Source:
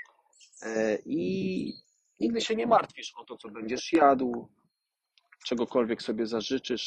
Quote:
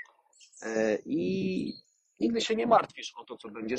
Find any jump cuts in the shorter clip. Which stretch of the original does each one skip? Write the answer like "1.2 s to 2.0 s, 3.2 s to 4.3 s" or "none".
none